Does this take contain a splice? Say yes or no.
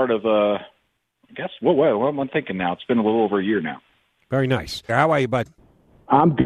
yes